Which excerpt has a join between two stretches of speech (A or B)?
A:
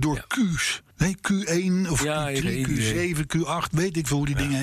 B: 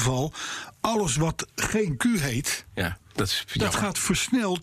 A